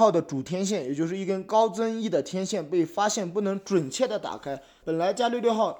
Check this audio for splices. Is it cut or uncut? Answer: cut